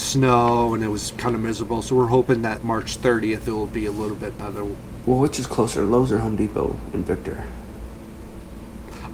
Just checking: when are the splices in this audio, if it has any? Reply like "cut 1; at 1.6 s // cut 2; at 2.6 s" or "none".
cut 1; at 2.6 s // cut 2; at 5.0 s